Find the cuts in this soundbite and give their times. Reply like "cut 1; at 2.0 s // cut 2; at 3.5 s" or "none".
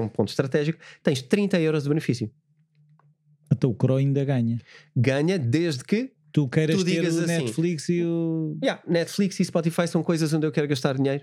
none